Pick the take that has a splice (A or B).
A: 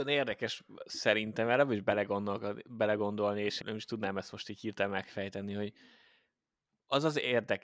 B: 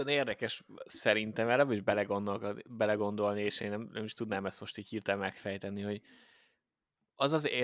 A